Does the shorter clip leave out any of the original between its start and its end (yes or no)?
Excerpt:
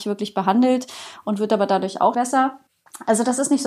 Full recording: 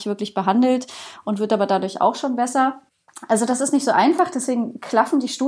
yes